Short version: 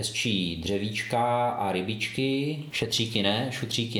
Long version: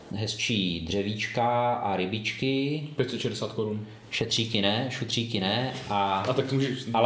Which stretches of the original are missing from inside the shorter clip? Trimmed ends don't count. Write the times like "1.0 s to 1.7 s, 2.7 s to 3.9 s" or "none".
2.9 s to 4.1 s